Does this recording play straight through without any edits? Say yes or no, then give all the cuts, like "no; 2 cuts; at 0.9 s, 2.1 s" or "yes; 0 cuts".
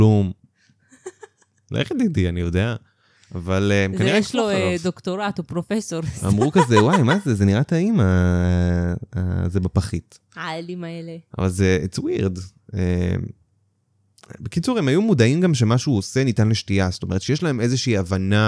yes; 0 cuts